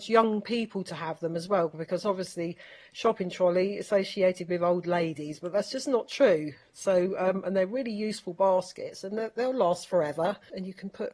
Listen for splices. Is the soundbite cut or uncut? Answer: uncut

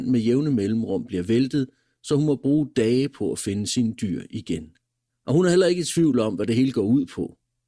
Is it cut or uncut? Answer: cut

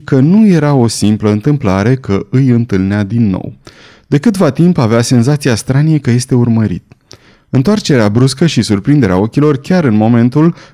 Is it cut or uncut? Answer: uncut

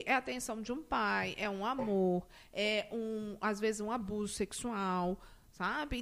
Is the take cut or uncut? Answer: uncut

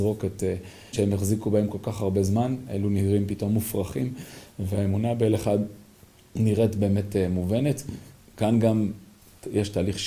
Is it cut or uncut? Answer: cut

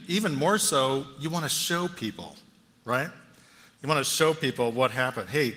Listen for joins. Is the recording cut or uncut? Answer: uncut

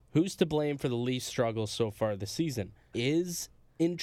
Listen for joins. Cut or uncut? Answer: cut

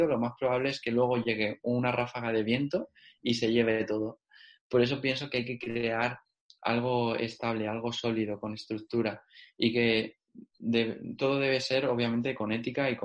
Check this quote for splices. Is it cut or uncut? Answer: uncut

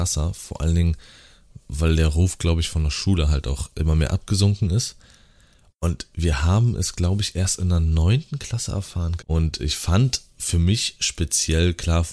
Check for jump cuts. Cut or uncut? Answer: cut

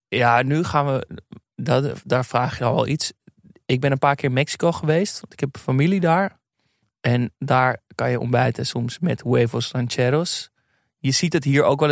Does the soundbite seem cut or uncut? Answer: uncut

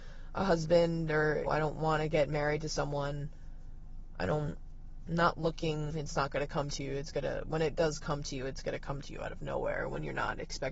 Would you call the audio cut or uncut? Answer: cut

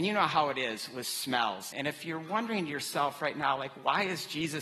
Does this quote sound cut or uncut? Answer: cut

